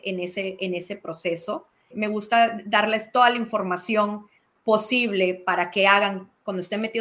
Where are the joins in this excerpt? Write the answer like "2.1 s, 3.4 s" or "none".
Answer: 1.9 s